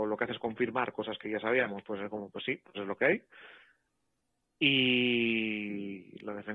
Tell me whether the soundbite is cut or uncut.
uncut